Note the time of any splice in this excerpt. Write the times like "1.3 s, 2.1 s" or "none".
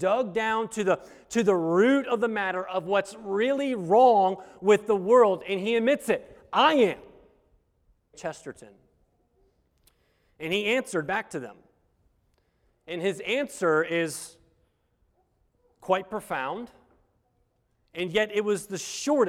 8.1 s